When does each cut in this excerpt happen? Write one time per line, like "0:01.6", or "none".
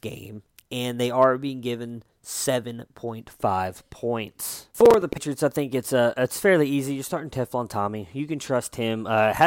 0:04.7